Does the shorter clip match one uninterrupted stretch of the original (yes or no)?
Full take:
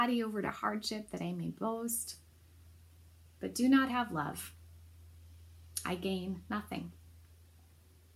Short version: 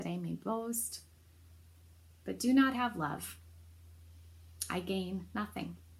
yes